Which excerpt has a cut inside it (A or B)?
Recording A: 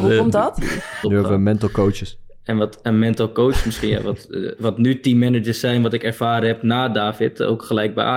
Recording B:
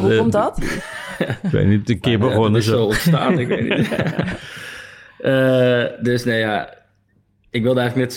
A